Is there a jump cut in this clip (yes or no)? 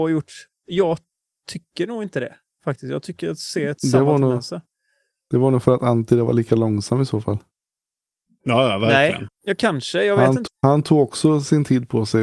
yes